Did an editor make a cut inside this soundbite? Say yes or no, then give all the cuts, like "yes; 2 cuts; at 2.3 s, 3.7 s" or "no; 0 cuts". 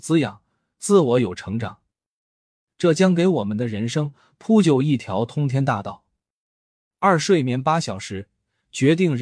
no; 0 cuts